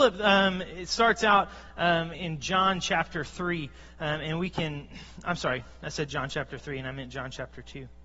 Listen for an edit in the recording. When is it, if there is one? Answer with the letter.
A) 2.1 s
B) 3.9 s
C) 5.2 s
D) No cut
A